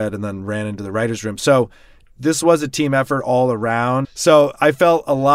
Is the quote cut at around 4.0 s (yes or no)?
yes